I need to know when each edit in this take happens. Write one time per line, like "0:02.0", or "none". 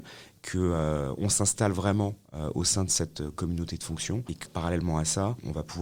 0:04.5